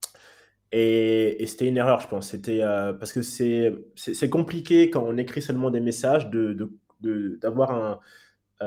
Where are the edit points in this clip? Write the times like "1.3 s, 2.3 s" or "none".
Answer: none